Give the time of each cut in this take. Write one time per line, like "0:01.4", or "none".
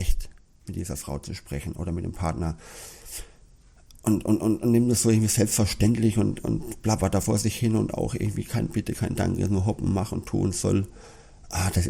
none